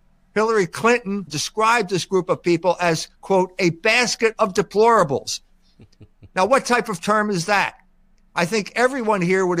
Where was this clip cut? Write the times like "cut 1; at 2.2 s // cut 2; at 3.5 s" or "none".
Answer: cut 1; at 1.3 s

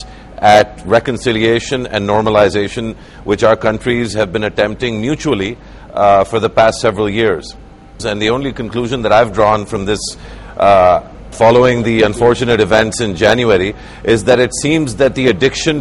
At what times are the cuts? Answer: cut 1; at 8.0 s // cut 2; at 11.3 s

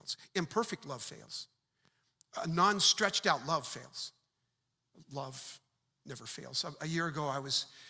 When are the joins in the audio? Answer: none

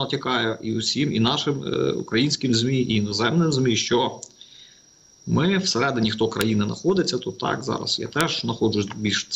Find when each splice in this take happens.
none

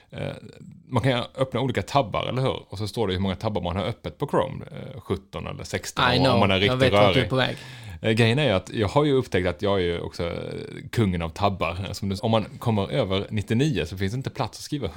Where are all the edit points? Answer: cut 1; at 12.2 s

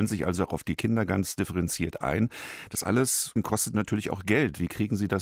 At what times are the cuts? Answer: none

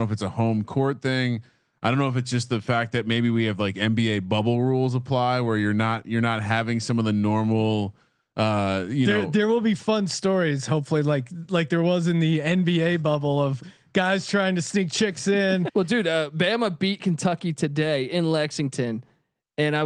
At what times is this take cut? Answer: cut 1; at 15.7 s

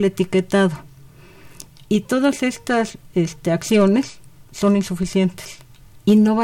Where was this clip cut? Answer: cut 1; at 4.4 s

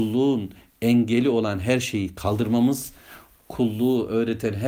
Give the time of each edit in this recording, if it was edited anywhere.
none

